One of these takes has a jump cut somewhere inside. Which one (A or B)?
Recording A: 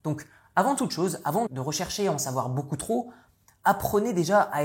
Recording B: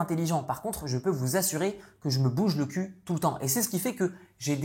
A